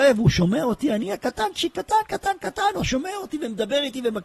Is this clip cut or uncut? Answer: uncut